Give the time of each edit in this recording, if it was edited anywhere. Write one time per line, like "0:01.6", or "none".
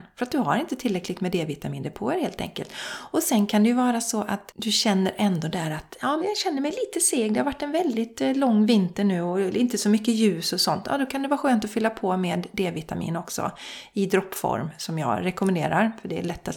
0:06.2

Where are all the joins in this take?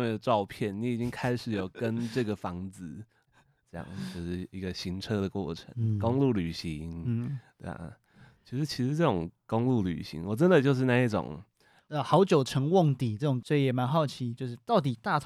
0:03.3
0:11.8

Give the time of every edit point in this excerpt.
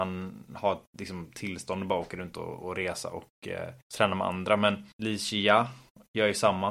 0:03.8
0:04.9

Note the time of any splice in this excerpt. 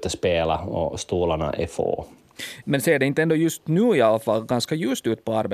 0:02.6

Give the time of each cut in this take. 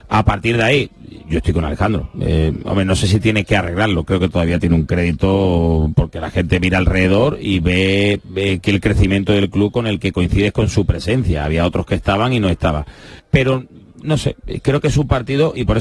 0:13.2

